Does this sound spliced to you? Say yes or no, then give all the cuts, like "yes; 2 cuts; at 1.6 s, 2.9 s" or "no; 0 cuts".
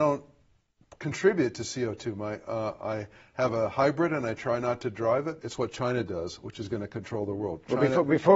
yes; 1 cut; at 5.4 s